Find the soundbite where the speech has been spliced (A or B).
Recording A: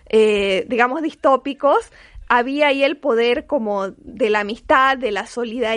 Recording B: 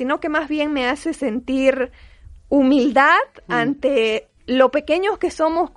B